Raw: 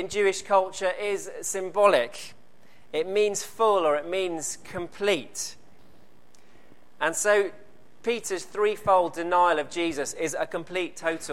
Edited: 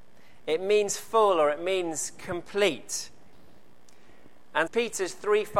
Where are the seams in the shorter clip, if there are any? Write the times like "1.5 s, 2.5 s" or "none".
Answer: 4.7 s